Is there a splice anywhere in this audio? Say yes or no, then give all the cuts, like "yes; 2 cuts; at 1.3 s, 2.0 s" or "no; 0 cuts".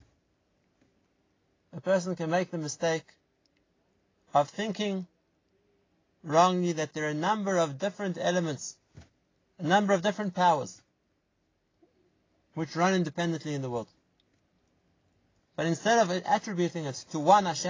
yes; 1 cut; at 15.4 s